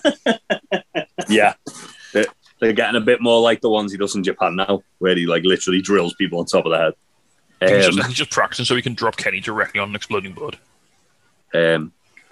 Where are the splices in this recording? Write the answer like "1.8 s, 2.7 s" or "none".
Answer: 11.4 s